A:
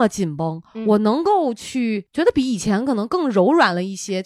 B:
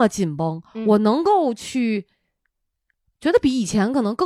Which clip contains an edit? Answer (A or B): A